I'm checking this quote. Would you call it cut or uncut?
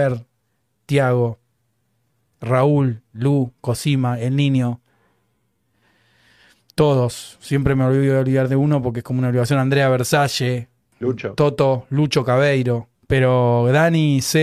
cut